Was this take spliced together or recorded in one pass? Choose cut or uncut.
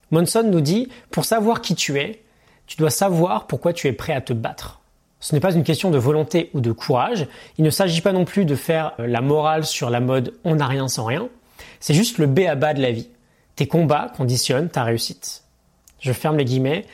cut